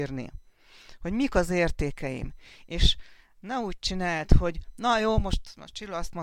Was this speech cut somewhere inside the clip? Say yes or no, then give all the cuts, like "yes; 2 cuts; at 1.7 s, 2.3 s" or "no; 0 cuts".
no; 0 cuts